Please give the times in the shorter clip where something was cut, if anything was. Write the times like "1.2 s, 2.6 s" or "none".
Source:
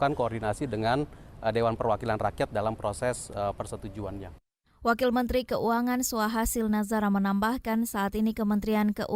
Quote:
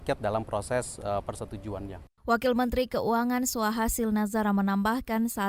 2.2 s